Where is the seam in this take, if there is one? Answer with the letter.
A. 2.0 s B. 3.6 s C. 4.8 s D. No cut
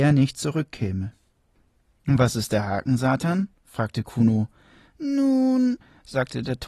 A